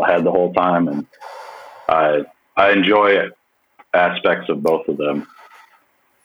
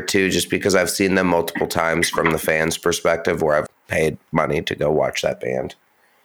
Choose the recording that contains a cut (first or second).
second